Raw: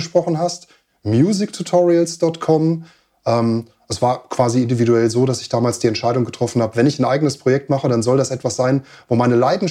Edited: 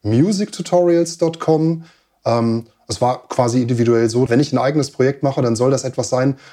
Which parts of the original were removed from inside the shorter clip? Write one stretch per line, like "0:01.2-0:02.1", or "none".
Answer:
0:05.3-0:06.7